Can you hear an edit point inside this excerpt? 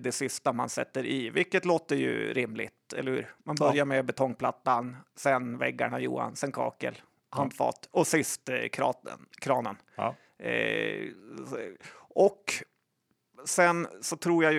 no; 0 cuts

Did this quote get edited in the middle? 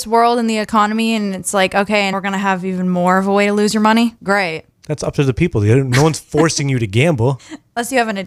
yes; 1 cut; at 2.1 s

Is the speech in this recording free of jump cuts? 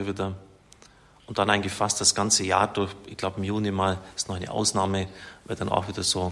yes; 0 cuts

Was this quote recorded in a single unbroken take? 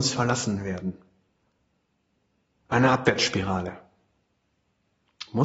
yes; 0 cuts

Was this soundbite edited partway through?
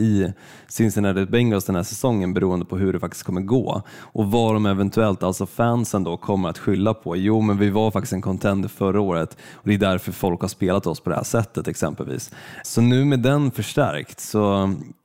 yes; 1 cut; at 12.6 s

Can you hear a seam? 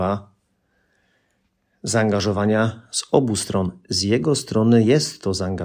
no; 0 cuts

